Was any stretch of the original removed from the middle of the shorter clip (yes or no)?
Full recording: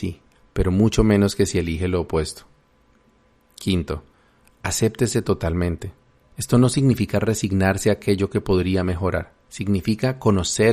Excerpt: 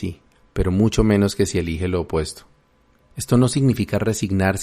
yes